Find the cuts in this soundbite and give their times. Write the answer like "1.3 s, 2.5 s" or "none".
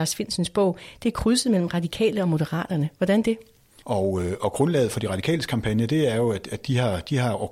3.8 s